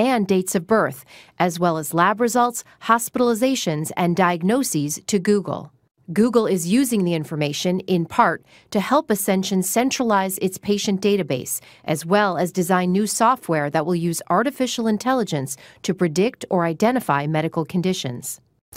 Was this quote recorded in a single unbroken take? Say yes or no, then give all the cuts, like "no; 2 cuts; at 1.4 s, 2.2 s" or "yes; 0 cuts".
yes; 0 cuts